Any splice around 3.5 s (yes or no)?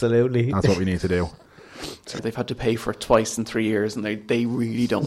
no